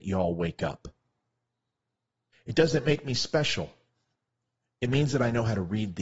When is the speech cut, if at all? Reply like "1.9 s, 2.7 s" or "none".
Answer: 2.3 s